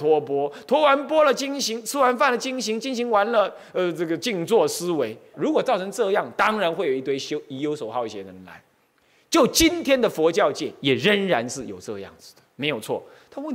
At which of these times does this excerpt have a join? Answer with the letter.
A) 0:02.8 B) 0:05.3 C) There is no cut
B